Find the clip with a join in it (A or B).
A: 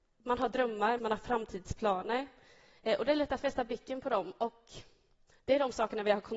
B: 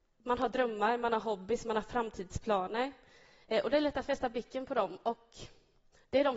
A